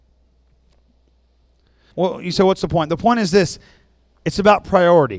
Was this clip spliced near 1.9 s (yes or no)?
yes